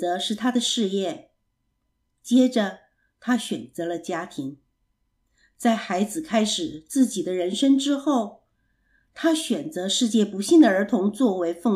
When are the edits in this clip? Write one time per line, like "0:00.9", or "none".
none